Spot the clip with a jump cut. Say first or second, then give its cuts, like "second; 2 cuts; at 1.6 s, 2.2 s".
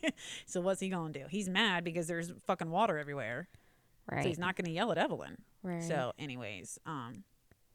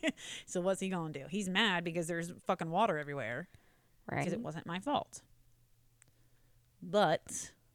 second; 1 cut; at 4.2 s